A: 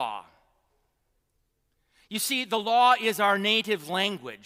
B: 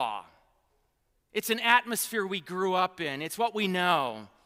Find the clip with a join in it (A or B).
B